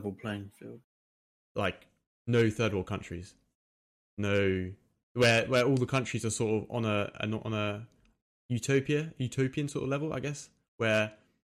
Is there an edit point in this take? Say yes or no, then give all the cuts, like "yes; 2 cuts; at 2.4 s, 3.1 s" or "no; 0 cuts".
no; 0 cuts